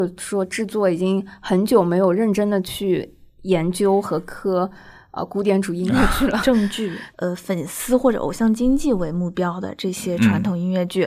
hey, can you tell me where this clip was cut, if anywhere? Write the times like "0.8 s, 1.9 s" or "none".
7.1 s